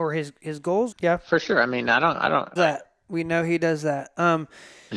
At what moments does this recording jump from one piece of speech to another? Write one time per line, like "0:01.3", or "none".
0:00.9
0:02.6